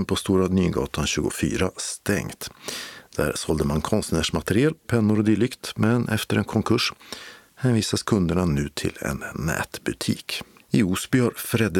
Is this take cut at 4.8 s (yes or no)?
yes